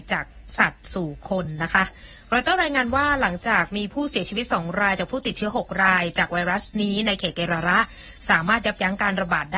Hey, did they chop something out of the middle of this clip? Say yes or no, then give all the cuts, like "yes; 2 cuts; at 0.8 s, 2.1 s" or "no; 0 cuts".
no; 0 cuts